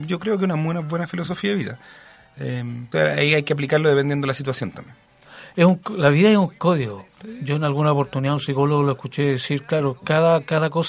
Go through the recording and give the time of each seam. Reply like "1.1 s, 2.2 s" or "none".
2.9 s